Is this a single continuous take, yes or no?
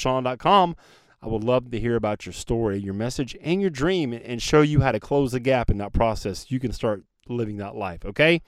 yes